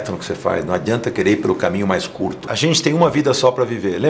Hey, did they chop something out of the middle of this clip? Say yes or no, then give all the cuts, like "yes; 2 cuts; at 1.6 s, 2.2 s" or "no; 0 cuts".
no; 0 cuts